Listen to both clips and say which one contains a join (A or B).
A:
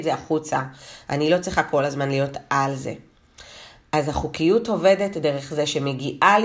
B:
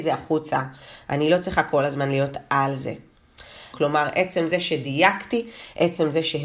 B